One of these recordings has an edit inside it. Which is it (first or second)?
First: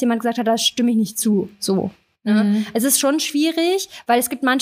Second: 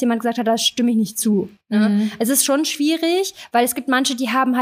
second